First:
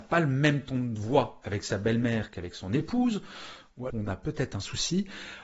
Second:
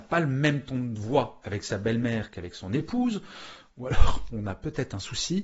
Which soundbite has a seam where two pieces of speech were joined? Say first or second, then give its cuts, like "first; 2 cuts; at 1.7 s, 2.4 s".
first; 1 cut; at 3.9 s